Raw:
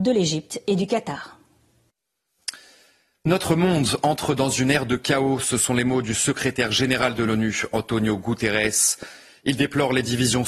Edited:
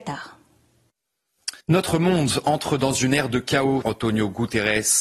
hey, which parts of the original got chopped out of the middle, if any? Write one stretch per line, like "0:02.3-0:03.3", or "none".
0:02.6-0:03.2
0:05.4-0:07.7